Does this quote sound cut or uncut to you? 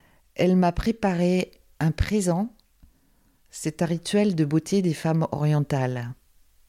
uncut